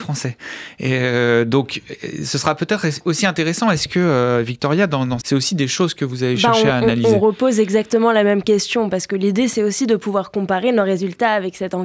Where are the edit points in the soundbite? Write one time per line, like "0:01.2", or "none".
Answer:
0:05.2